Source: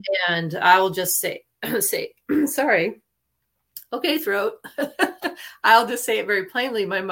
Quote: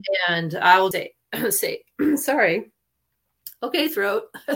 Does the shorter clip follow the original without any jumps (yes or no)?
no